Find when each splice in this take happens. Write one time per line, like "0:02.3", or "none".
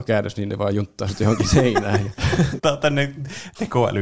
0:02.6